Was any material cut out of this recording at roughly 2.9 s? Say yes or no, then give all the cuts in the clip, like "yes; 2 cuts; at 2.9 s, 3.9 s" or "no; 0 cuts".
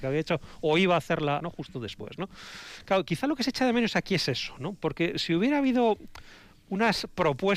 no; 1 cut; at 1.4 s